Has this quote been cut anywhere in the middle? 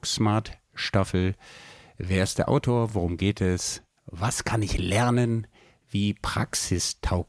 no; 0 cuts

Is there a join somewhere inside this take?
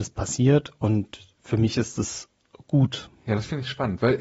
yes; 1 cut; at 3.2 s

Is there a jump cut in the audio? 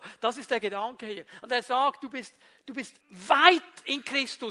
yes; 1 cut; at 3.0 s

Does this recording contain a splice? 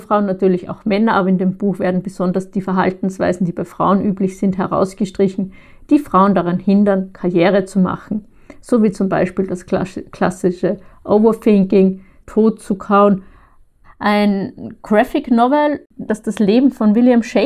yes; 3 cuts; at 12.2 s, 13.8 s, 16.1 s

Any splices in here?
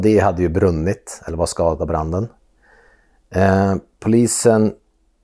no; 0 cuts

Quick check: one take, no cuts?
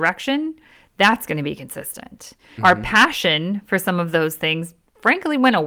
no; 1 cut; at 2.6 s

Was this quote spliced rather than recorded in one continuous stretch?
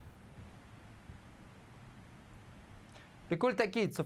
no; 0 cuts

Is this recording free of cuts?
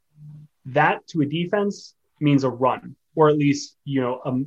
yes; 0 cuts

